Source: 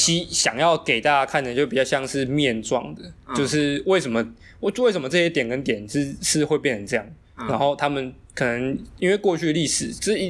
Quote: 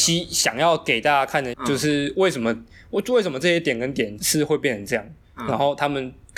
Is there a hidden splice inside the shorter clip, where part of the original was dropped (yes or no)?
yes